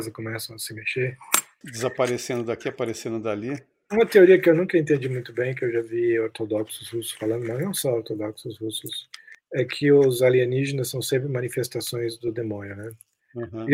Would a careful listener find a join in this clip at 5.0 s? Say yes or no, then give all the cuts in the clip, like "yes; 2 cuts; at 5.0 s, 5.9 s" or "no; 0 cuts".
no; 1 cut; at 1.6 s